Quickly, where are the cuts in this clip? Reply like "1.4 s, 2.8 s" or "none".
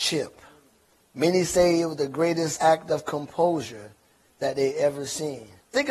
2.6 s